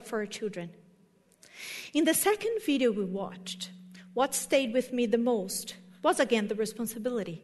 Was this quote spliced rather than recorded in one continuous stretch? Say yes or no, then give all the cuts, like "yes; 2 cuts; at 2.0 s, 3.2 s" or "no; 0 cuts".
no; 0 cuts